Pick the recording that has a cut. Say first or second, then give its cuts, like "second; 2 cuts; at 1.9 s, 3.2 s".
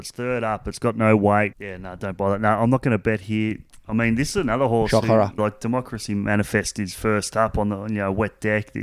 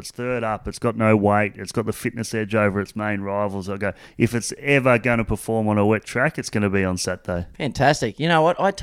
first; 2 cuts; at 1.5 s, 5.4 s